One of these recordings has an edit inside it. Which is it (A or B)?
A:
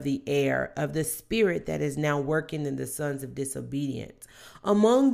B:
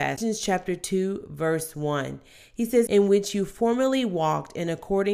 B